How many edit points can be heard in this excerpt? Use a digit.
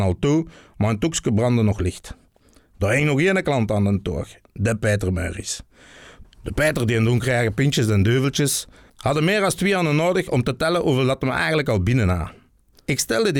2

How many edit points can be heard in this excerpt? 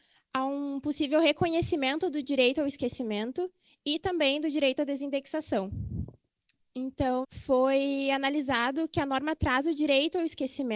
1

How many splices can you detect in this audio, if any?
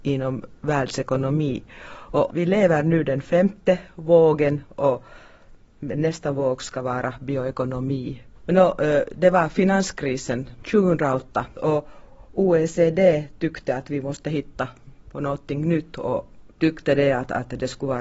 1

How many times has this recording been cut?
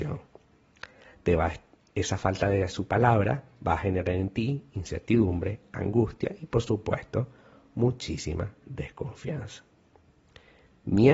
1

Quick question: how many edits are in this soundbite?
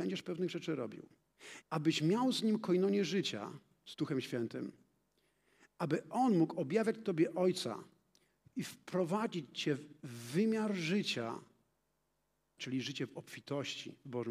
2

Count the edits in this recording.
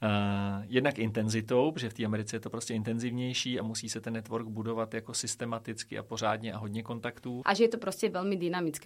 1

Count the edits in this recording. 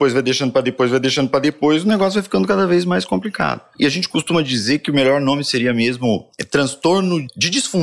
0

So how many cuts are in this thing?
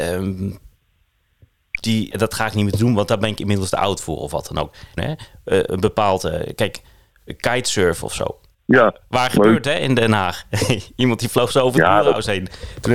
3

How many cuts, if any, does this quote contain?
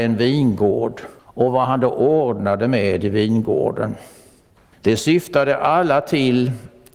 2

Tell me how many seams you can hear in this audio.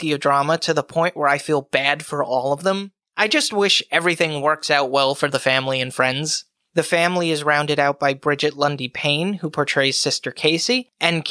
1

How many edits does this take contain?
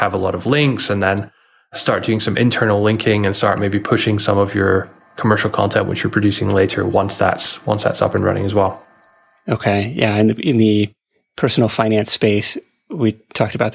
0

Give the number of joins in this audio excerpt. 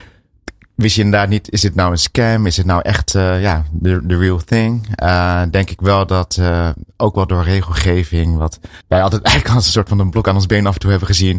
1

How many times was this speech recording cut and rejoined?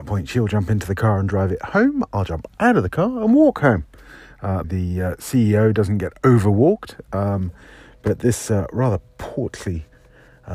1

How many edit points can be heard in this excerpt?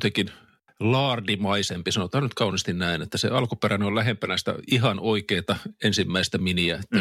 0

